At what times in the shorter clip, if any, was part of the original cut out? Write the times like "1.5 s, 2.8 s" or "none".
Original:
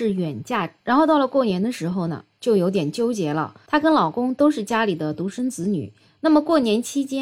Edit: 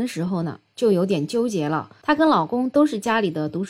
none

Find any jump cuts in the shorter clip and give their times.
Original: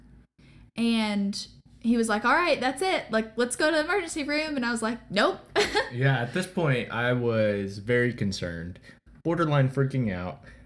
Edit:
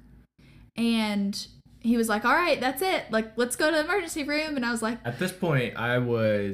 5.0 s

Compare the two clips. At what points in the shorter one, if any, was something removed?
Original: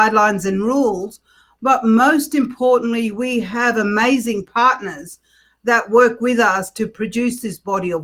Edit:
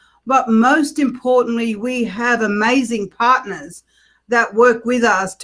none

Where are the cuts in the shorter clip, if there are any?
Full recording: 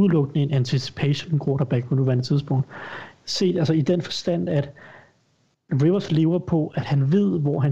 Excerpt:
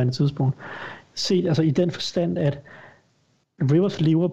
none

